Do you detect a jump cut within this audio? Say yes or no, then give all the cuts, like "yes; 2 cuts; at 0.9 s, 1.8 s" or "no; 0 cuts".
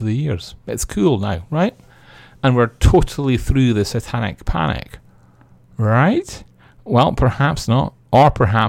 no; 0 cuts